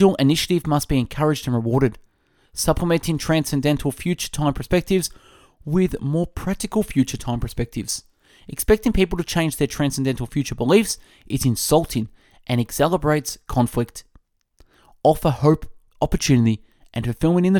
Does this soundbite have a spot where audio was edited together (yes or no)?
no